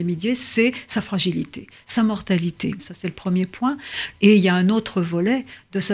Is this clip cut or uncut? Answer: cut